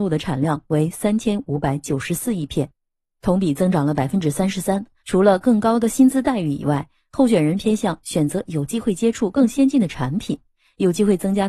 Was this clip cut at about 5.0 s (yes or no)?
yes